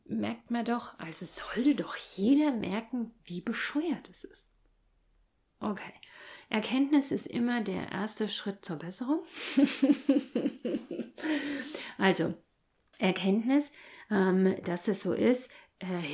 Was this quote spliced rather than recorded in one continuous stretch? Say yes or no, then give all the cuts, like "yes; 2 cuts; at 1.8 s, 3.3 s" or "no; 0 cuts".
no; 0 cuts